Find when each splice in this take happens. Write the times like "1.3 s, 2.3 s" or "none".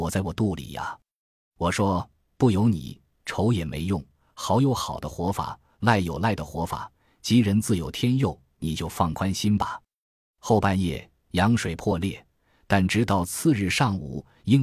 none